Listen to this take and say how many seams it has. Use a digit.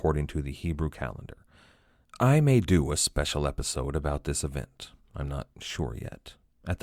1